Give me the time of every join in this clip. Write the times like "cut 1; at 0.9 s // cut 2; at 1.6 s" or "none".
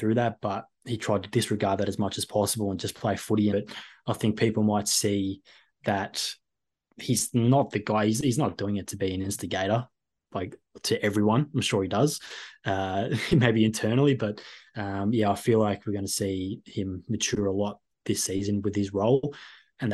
cut 1; at 3.5 s